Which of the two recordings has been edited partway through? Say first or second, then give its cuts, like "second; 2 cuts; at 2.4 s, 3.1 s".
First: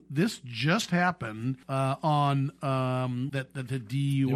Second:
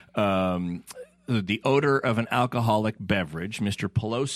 first; 2 cuts; at 1.6 s, 3.3 s